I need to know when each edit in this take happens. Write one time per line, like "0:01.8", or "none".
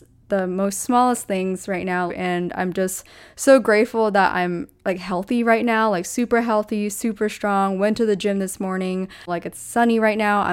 0:02.1
0:09.3